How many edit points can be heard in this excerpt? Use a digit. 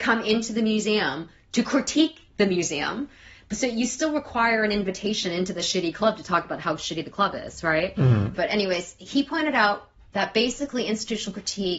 2